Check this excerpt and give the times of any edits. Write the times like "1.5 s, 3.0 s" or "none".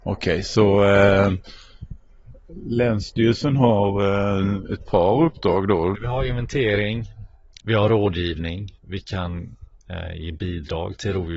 5.9 s, 7.6 s, 8.8 s